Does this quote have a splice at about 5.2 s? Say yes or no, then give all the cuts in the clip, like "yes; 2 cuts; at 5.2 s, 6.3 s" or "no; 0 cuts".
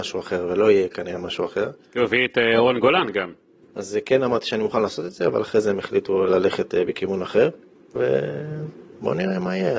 no; 2 cuts; at 3.6 s, 8.0 s